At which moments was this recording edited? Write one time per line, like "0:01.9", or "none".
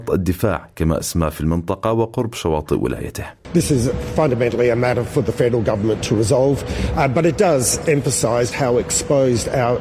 0:08.5